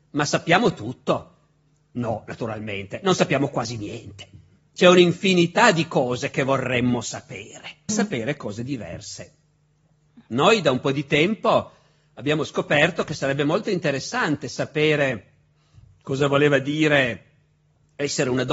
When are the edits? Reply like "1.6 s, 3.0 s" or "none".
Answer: 7.9 s